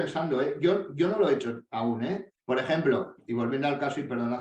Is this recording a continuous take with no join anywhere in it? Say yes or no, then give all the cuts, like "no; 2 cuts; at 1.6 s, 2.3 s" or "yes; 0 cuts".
no; 1 cut; at 2.3 s